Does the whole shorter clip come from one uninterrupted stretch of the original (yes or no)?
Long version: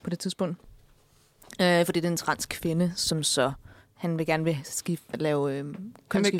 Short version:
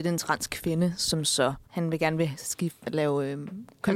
no